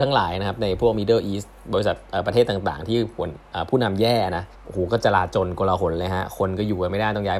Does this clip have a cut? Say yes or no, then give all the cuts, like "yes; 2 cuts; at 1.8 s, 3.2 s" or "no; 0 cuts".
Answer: yes; 1 cut; at 4.5 s